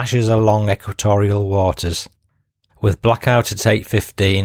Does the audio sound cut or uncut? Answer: cut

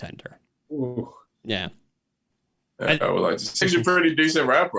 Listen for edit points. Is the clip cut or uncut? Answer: cut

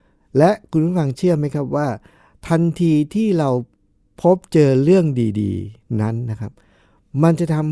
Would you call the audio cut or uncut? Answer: uncut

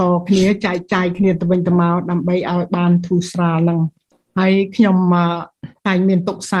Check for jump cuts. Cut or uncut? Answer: uncut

